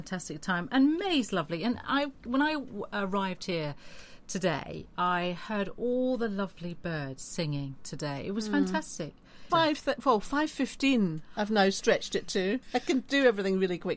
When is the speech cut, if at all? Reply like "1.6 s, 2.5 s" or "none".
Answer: 9.5 s